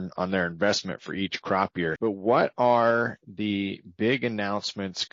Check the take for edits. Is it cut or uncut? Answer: cut